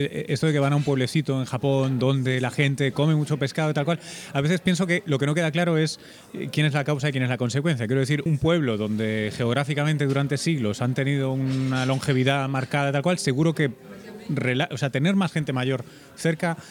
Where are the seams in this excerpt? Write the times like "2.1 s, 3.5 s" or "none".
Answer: 8.3 s